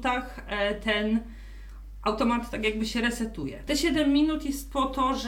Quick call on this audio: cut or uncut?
cut